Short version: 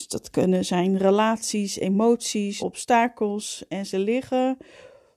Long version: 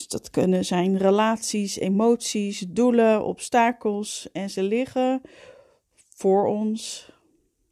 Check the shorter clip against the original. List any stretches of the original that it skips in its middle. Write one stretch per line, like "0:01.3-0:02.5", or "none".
0:02.6-0:03.2

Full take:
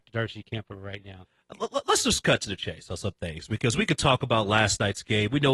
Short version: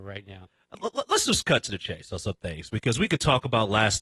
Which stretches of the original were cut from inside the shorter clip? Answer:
none

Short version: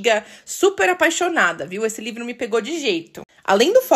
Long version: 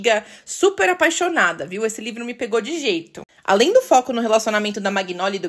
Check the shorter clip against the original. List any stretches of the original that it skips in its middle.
none

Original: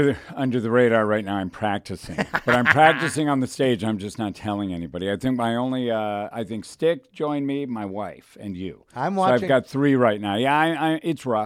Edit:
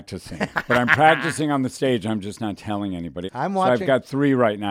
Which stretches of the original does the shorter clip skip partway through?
0:05.0-0:08.9

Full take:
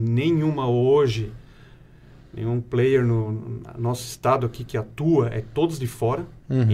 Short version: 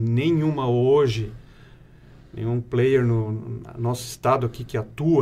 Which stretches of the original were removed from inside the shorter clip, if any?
none

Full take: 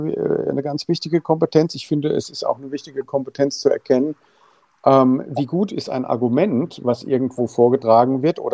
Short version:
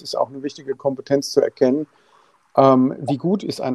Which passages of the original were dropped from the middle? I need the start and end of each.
none

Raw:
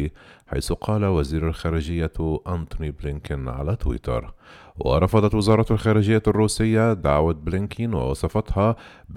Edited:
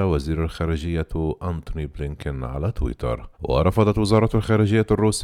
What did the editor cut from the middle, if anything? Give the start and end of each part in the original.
0:04.4-0:04.7

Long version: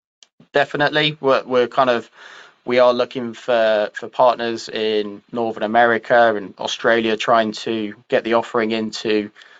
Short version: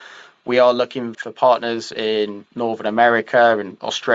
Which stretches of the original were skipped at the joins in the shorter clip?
0:03.3-0:03.9

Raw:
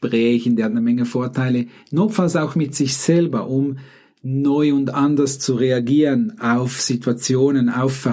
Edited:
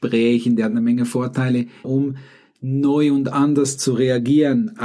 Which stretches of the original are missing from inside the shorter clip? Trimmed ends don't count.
0:01.8-0:03.5

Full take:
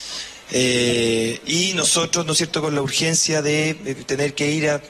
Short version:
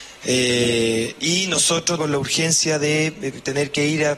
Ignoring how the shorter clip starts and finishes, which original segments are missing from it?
0:02.2-0:02.6

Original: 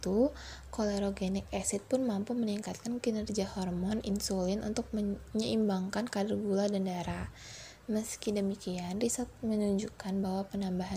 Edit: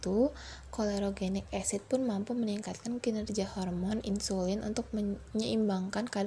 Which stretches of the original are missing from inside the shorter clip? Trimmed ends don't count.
none

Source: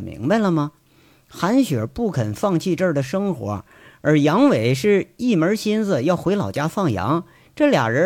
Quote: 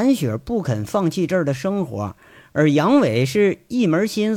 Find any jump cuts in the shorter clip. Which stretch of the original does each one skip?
none

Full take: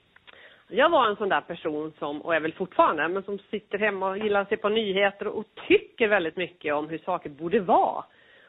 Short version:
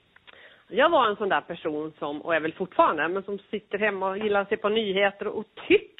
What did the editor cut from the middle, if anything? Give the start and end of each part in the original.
none

